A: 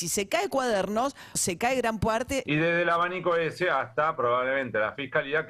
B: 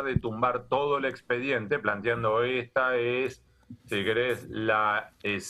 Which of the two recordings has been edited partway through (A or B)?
A